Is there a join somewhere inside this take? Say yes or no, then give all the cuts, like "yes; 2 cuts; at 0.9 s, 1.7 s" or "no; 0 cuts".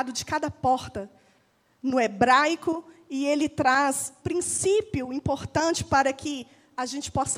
yes; 1 cut; at 4.2 s